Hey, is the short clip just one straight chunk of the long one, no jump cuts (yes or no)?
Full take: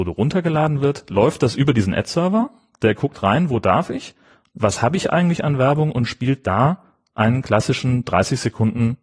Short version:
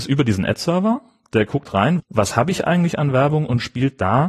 no